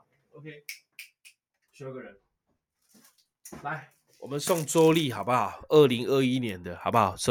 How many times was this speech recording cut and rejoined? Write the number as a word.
one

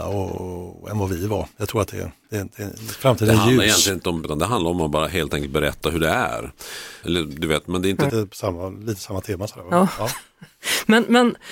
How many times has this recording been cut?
three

